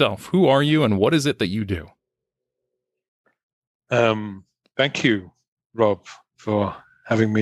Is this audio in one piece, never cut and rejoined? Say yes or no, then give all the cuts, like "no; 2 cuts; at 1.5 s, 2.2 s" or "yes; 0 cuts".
yes; 0 cuts